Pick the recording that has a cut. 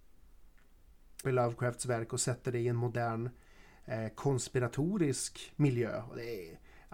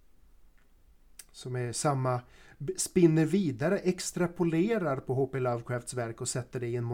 first; 1 cut; at 1.2 s

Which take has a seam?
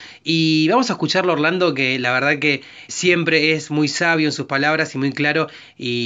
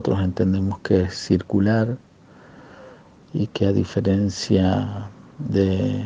first; 1 cut; at 2.9 s

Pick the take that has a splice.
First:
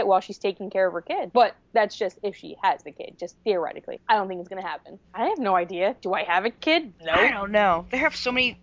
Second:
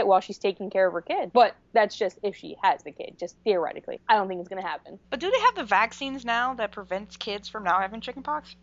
first; 2 cuts; at 5.1 s, 6.9 s

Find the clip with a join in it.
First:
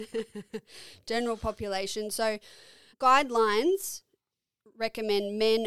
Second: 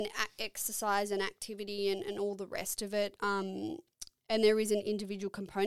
first; 1 cut; at 2.9 s

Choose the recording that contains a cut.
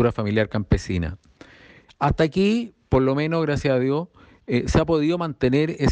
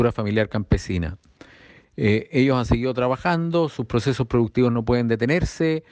first; 1 cut; at 1.9 s

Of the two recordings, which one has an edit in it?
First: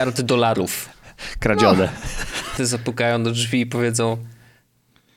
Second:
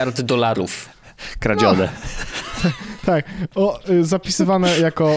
first; 1 cut; at 2.6 s

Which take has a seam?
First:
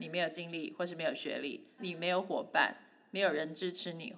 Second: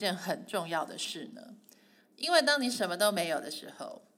first; 1 cut; at 1.8 s

